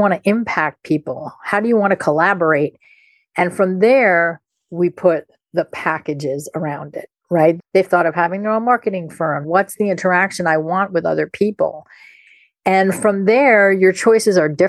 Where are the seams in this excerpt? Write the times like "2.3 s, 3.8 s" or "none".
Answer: 7.6 s, 9.4 s